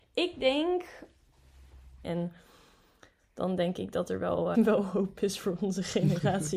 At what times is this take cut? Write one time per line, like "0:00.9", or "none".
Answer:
0:02.0
0:04.5